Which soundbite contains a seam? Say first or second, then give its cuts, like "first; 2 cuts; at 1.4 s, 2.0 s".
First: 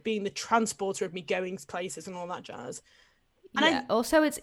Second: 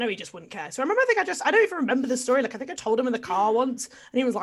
second; 1 cut; at 2.8 s